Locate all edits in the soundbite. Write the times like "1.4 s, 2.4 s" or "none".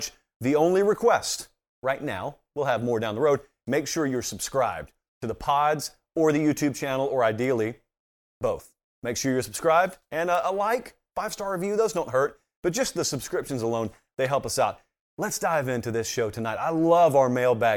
none